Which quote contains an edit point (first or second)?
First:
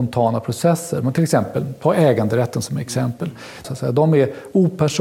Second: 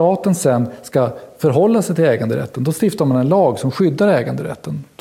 first